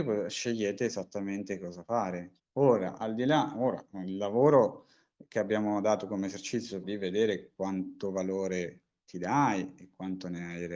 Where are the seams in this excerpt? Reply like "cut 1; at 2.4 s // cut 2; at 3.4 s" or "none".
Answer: cut 1; at 2.4 s // cut 2; at 6.8 s